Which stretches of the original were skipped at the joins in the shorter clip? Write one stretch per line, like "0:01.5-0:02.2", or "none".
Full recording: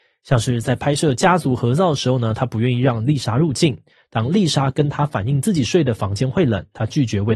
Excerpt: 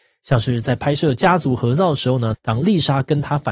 0:02.3-0:04.0